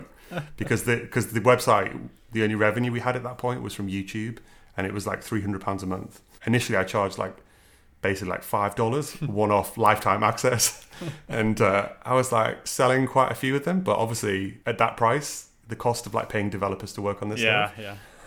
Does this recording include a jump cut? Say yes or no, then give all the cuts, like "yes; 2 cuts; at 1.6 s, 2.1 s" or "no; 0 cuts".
yes; 2 cuts; at 6.4 s, 14.6 s